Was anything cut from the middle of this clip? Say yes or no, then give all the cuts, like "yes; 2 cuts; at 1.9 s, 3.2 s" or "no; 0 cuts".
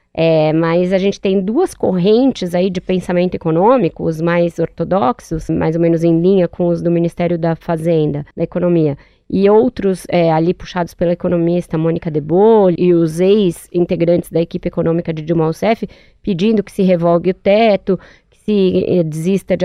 yes; 3 cuts; at 5.5 s, 8.3 s, 12.8 s